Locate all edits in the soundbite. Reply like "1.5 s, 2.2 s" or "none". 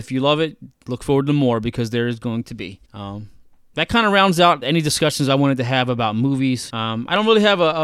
2.8 s, 4.6 s, 6.7 s